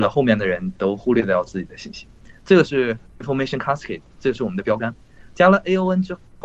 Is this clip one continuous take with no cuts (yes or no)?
yes